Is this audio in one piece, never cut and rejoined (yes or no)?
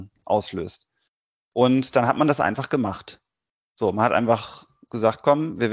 yes